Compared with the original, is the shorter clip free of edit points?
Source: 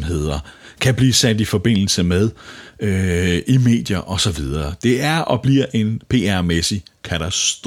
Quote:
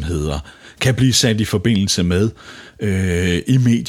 yes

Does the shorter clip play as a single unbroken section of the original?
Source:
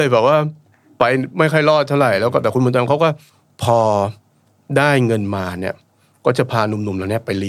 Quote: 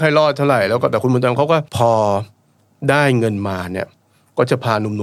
no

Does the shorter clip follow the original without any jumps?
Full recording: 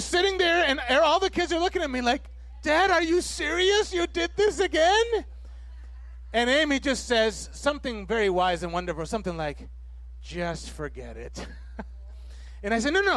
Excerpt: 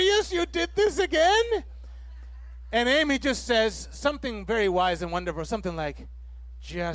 yes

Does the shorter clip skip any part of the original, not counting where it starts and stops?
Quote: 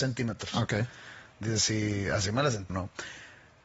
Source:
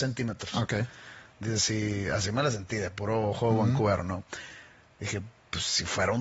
yes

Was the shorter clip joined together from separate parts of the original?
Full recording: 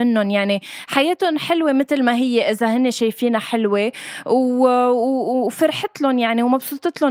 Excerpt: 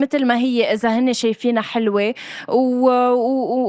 no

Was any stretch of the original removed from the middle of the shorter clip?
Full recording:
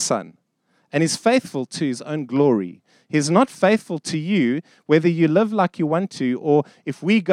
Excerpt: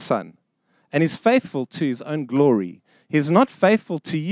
no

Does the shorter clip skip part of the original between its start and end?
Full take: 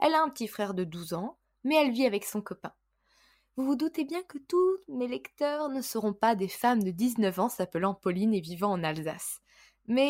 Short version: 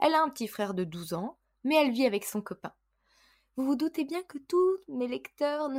no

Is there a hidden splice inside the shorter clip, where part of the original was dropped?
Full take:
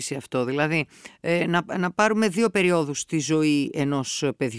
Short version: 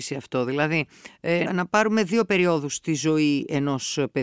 yes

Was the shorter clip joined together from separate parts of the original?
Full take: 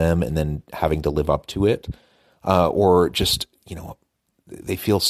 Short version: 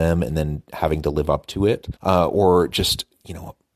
yes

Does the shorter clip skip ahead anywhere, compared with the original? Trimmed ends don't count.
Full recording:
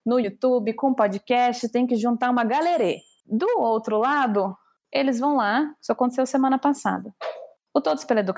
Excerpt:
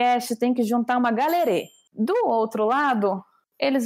no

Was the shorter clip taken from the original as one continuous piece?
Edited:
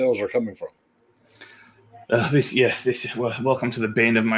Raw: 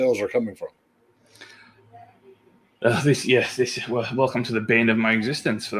no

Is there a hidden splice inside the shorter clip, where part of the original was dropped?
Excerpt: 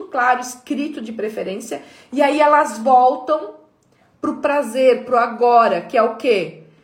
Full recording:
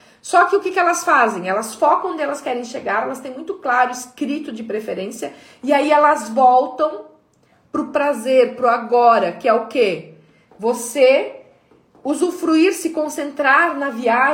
no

